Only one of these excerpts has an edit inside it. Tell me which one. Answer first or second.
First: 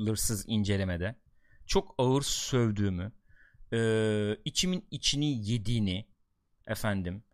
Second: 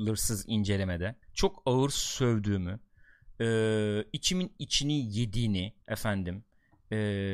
second